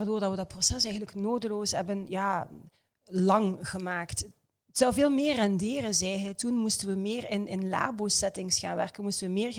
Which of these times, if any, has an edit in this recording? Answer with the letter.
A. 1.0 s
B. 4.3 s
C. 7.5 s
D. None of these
D